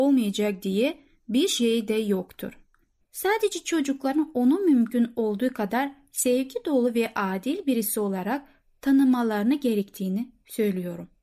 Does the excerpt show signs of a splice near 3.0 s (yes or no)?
yes